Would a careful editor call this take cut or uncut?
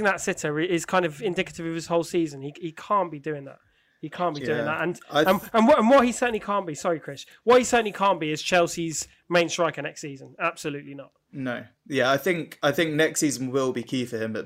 uncut